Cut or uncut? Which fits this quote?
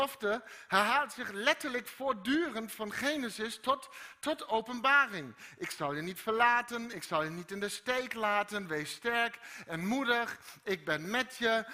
uncut